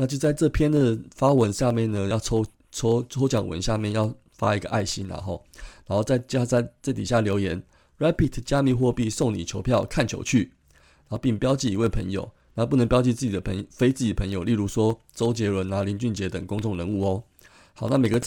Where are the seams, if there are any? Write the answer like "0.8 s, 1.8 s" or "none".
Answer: none